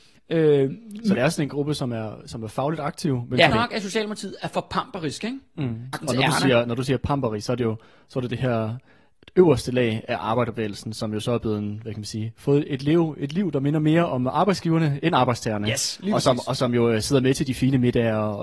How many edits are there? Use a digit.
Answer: 2